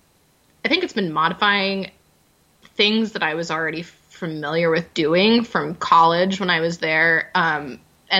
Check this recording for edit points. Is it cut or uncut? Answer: uncut